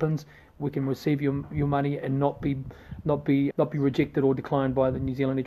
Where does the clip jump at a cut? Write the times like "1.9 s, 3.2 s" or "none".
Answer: 3.5 s